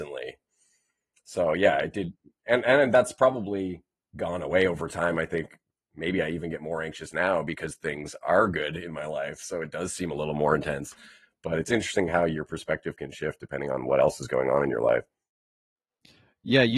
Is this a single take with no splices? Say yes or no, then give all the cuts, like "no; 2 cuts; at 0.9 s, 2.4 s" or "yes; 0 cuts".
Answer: yes; 0 cuts